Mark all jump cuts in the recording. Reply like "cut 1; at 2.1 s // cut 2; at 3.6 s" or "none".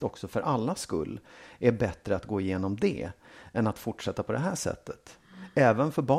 none